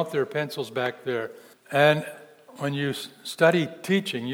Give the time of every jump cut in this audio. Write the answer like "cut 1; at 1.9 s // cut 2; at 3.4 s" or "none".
cut 1; at 1.5 s